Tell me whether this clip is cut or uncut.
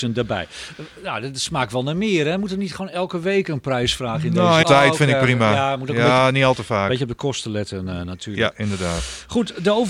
cut